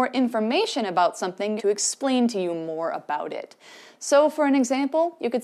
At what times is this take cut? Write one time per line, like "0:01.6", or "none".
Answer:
0:01.6